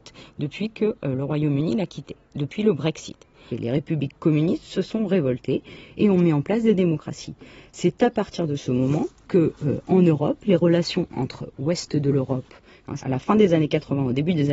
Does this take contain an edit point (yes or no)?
yes